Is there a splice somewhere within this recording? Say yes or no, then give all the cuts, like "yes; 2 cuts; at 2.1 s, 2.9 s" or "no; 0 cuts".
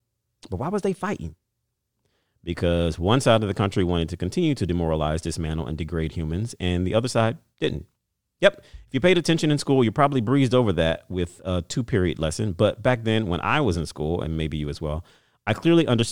no; 0 cuts